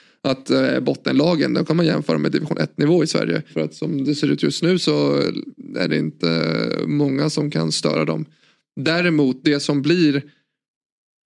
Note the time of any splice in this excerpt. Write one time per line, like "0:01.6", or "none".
0:03.5